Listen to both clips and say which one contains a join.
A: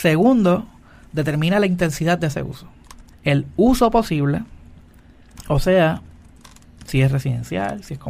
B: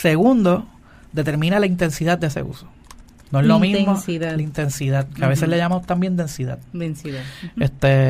A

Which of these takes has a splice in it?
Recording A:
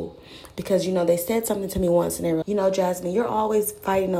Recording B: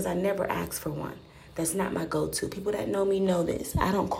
A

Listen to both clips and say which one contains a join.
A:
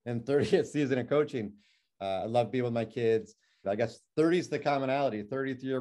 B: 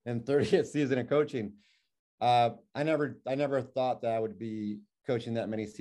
A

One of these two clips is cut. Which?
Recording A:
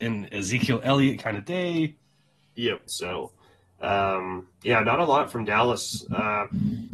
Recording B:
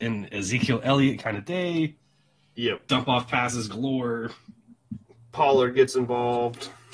A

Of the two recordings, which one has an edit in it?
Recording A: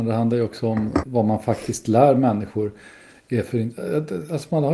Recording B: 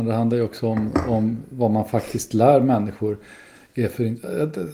A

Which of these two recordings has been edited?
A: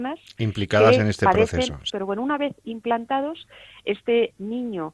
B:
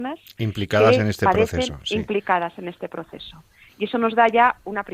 A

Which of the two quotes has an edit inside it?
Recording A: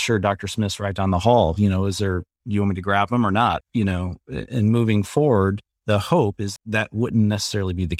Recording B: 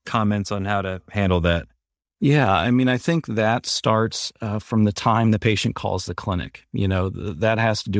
A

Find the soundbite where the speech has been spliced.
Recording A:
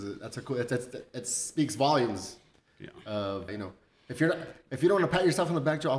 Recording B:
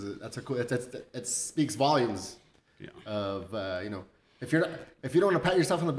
A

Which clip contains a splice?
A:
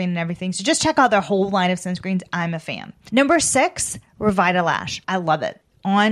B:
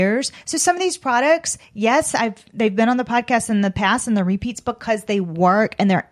A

